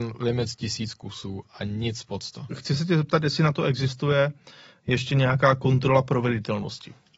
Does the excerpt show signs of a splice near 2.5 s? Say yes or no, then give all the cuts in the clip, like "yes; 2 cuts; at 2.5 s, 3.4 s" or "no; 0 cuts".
yes; 1 cut; at 2.5 s